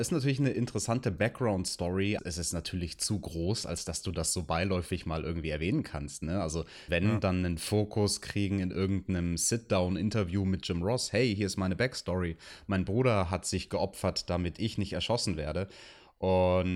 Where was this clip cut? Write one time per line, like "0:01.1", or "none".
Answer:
0:02.2
0:06.9

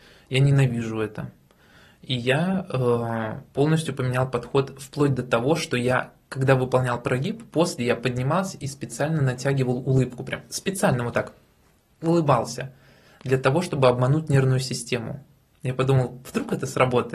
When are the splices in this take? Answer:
none

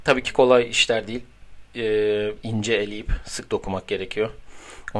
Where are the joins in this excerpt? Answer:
0:02.4

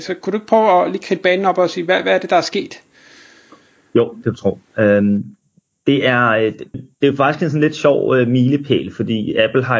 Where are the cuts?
0:06.7

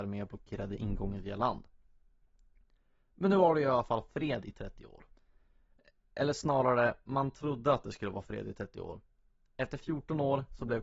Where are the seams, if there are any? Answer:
none

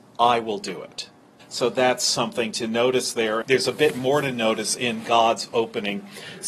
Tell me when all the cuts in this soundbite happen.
0:01.4
0:03.4

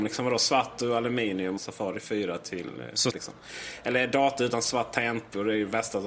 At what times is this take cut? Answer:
0:01.6
0:03.1

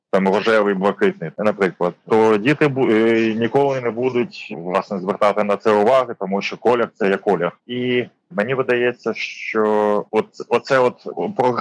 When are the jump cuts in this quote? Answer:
0:01.3
0:07.6

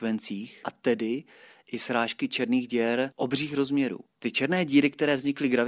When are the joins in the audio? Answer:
none

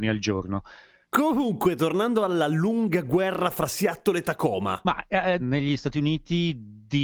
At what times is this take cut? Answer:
0:01.1
0:05.4

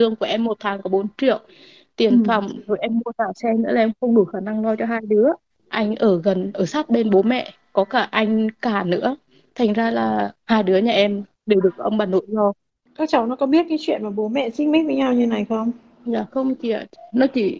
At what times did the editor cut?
none

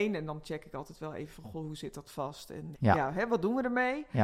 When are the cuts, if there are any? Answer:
0:02.7

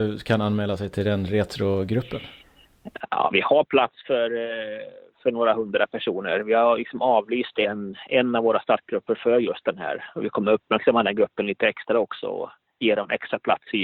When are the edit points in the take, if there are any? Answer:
none

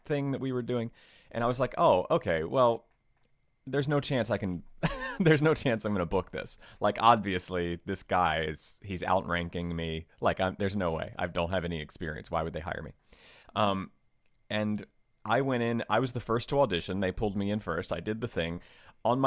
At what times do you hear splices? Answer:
none

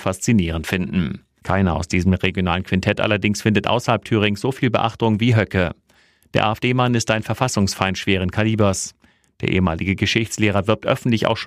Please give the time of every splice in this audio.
0:01.4

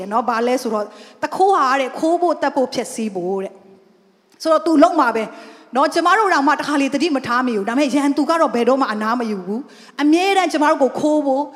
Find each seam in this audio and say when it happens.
none

